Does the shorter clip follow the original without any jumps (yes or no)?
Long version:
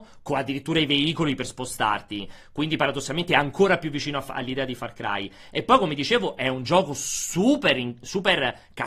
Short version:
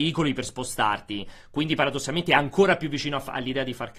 yes